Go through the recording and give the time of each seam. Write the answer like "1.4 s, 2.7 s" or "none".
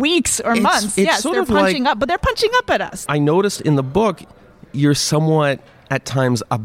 none